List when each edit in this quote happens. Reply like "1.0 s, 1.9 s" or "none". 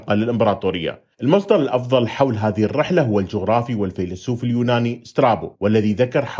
1.1 s